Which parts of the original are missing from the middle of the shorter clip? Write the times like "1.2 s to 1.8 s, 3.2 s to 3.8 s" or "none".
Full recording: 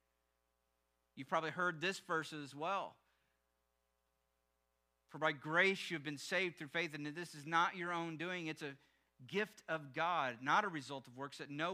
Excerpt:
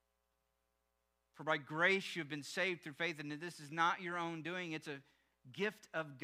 none